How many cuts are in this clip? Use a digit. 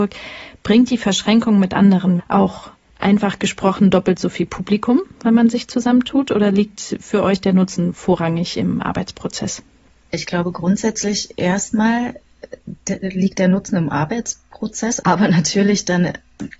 2